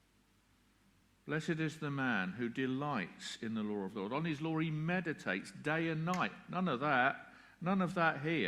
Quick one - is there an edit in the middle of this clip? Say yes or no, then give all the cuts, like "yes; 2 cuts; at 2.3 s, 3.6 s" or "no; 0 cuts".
no; 0 cuts